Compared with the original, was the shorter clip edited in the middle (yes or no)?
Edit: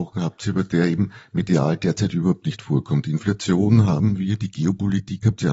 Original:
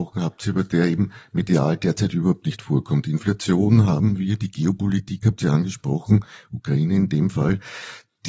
no